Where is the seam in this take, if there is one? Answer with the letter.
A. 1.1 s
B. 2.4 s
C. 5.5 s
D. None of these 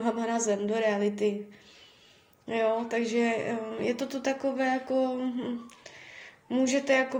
D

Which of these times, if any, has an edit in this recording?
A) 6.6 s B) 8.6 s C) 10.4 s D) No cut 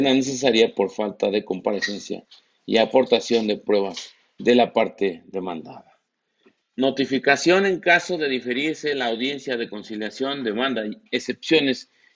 A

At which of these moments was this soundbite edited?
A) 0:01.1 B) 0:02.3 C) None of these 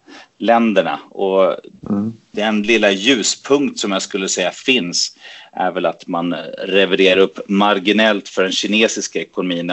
C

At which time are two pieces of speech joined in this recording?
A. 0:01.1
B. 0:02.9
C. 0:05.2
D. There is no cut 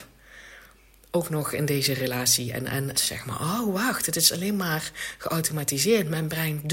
B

